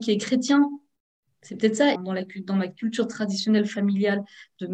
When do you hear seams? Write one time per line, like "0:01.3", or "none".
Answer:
0:02.0